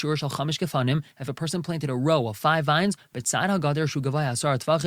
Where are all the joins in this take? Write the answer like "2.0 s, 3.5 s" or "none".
none